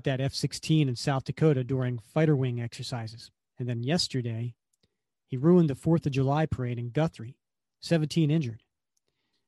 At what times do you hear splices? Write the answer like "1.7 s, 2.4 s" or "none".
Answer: 3.4 s